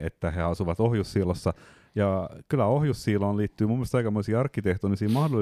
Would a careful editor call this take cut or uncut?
uncut